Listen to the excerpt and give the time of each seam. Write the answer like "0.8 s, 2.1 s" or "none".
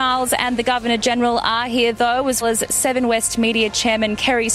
2.4 s